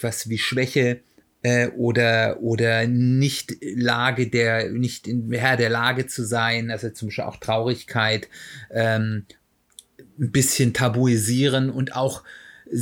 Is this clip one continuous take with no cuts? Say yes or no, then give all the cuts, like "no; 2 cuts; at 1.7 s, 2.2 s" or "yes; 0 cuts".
yes; 0 cuts